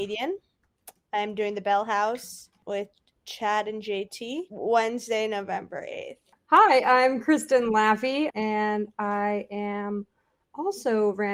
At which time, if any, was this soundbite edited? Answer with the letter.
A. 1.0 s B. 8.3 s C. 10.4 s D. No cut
B